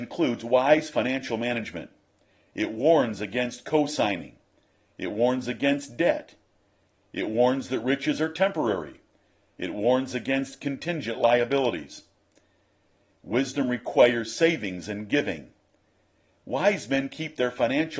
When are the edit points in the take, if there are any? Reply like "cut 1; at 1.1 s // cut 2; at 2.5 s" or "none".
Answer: none